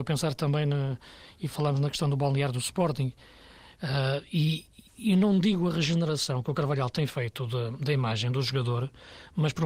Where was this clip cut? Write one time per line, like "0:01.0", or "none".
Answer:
0:03.8
0:04.9

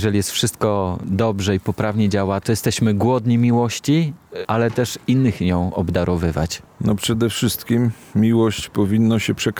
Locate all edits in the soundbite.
0:02.4
0:04.4

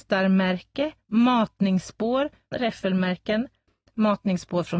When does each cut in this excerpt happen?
0:02.5

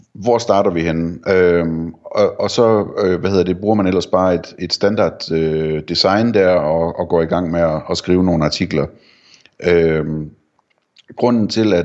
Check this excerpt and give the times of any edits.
0:01.2

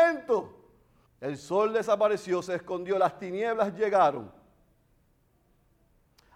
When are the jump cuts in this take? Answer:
0:01.1

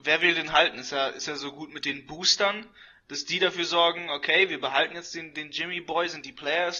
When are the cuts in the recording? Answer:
none

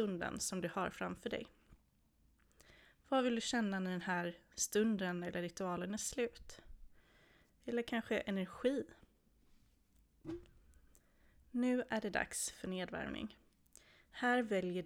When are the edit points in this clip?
0:07.5

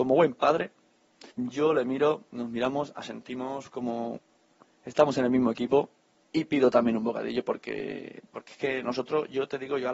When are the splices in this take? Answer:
0:01.3

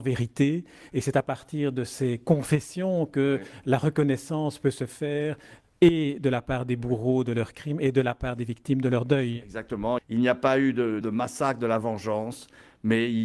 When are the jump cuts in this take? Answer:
0:10.0
0:11.0

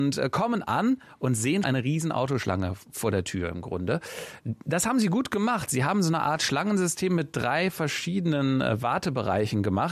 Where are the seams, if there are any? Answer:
0:01.6

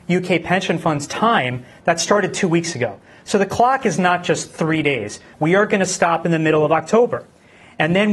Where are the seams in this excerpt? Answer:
0:05.3

